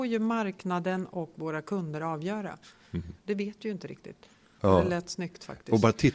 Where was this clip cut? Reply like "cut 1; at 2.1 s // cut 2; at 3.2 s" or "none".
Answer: cut 1; at 3.2 s // cut 2; at 4.6 s